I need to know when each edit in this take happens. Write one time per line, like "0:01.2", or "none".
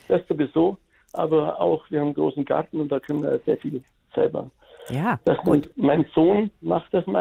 none